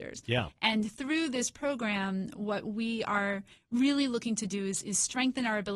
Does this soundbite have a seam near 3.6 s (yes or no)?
no